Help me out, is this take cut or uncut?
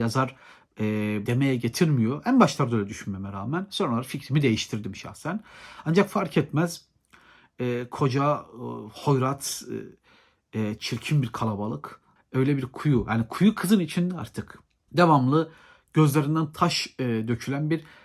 cut